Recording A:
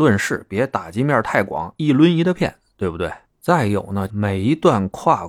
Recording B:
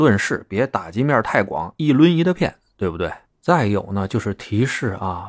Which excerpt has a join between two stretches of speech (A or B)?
A